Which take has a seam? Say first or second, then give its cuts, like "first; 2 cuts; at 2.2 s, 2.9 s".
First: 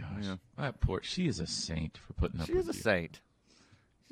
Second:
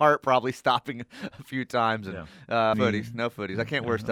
second; 1 cut; at 2.7 s